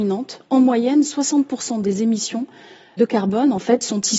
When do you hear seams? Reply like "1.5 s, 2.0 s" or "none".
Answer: 3.0 s